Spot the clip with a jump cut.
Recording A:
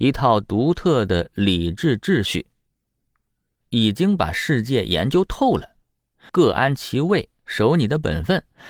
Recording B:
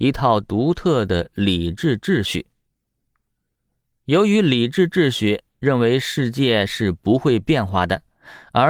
A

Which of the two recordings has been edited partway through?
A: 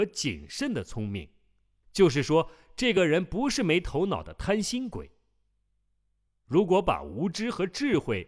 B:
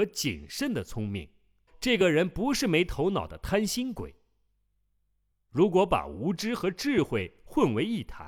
B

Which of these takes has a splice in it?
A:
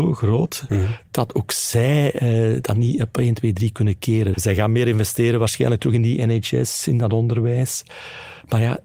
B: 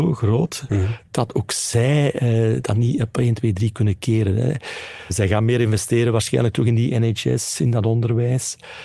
A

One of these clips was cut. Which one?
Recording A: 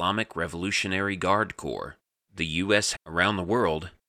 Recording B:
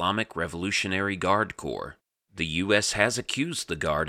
A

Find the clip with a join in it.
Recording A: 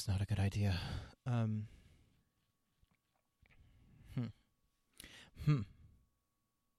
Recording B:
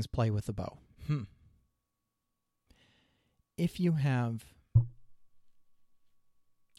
B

